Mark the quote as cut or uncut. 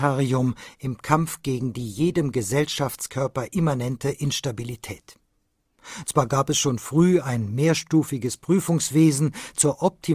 cut